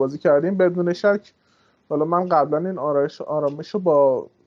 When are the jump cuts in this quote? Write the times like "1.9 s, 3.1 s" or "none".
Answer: none